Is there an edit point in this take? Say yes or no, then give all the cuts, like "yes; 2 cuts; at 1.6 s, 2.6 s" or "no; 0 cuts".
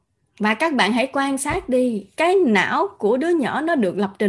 yes; 1 cut; at 2.1 s